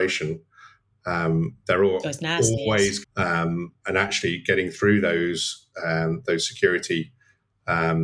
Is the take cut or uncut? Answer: cut